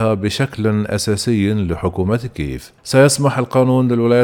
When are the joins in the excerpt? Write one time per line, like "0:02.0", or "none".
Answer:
0:02.8